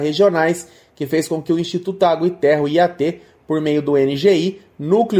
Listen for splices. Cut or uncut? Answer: uncut